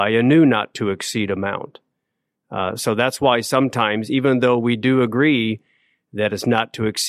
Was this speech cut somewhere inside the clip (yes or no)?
no